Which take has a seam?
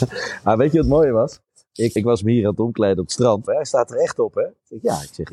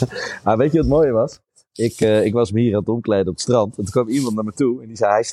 first; 2 cuts; at 2.0 s, 3.5 s

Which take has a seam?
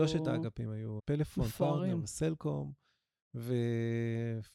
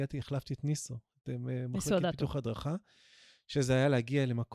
first; 1 cut; at 1.0 s

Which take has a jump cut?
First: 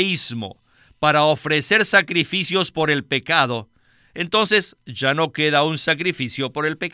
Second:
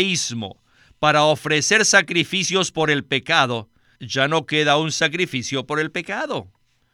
second; 1 cut; at 4.0 s

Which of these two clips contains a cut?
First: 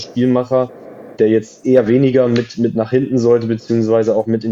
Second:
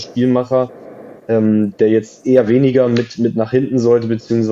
first; 1 cut; at 1.2 s

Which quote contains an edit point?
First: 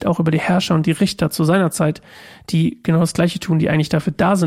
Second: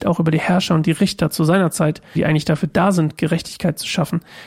second; 1 cut; at 2.2 s

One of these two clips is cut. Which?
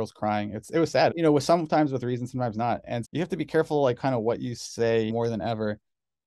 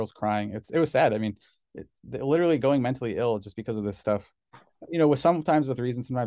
first; 3 cuts; at 1.1 s, 3.0 s, 5.1 s

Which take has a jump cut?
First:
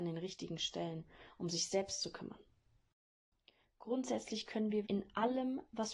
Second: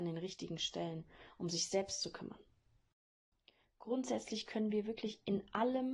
first; 1 cut; at 4.8 s

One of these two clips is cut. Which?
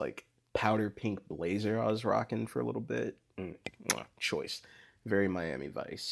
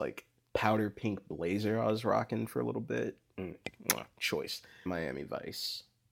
second; 1 cut; at 4.9 s

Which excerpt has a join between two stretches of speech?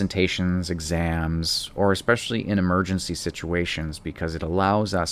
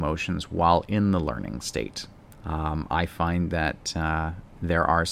second; 1 cut; at 2.3 s

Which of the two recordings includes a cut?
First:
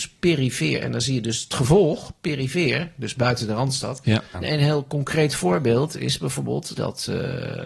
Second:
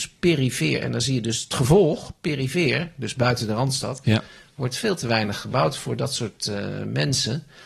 first; 2 cuts; at 4.3 s, 6.7 s

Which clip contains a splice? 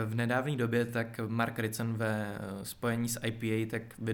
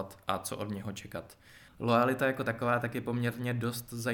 second; 1 cut; at 1.7 s

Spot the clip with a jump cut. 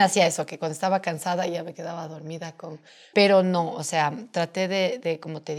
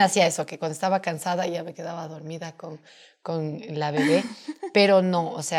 first; 1 cut; at 3.1 s

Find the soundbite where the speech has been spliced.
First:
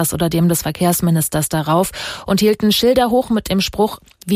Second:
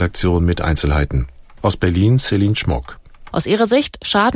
second; 2 cuts; at 1.6 s, 3.3 s

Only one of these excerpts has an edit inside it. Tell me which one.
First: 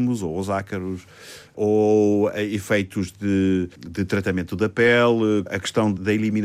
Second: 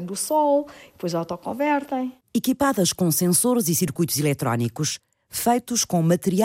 second; 1 cut; at 2.2 s

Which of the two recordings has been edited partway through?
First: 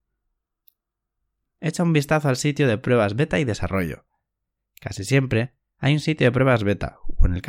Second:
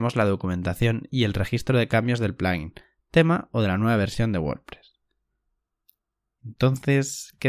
second; 1 cut; at 6.4 s

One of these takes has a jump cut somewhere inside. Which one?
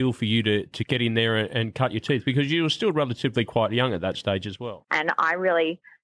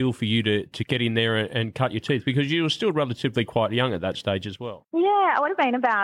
first; 1 cut; at 4.9 s

